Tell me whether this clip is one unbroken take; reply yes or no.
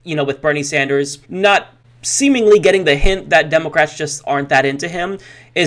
no